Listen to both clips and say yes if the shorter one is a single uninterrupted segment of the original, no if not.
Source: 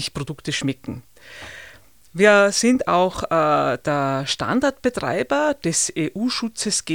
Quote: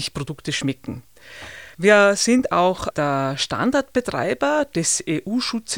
no